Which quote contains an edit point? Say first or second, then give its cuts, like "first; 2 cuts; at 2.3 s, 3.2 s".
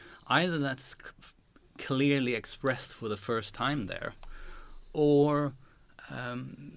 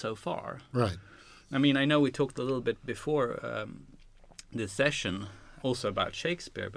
second; 1 cut; at 5.6 s